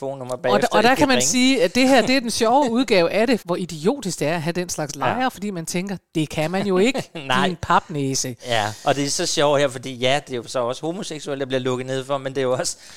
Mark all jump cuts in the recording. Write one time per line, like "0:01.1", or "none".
0:03.4